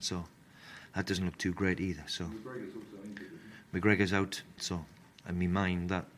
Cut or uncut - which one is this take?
cut